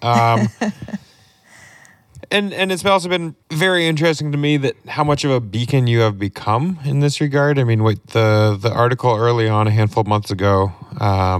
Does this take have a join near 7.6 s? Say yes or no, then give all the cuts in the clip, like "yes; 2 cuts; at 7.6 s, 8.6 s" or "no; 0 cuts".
no; 1 cut; at 3.4 s